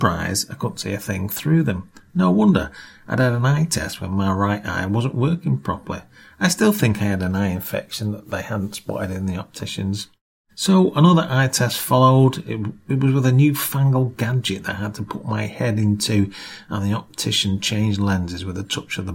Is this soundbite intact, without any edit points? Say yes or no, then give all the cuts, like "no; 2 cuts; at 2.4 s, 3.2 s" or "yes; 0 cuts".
yes; 0 cuts